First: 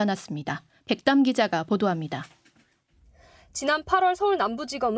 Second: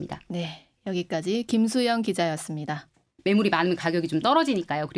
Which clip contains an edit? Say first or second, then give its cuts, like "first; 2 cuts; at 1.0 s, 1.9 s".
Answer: second; 1 cut; at 3.2 s